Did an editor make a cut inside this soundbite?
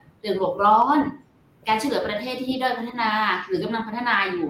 no; 0 cuts

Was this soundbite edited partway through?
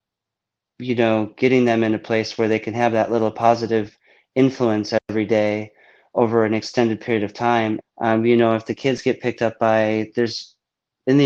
yes; 1 cut; at 7.8 s

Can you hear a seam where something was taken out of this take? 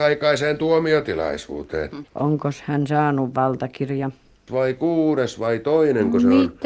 yes; 2 cuts; at 2.1 s, 4.5 s

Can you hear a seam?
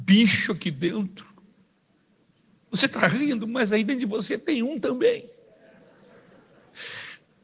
no; 0 cuts

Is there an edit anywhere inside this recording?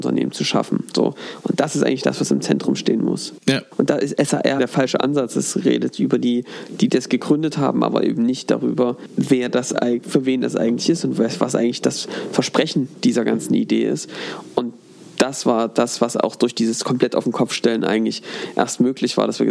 yes; 1 cut; at 4.6 s

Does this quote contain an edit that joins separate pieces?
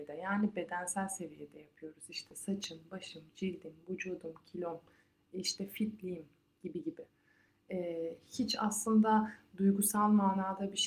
no; 0 cuts

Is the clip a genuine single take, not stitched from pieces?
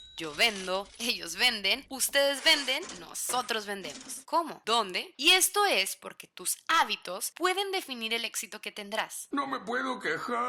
no; 2 cuts; at 1.0 s, 5.2 s

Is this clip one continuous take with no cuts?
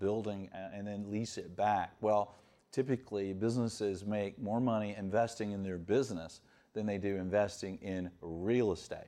yes; 0 cuts

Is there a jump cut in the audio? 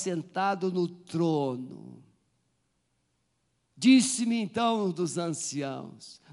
yes; 1 cut; at 3.7 s

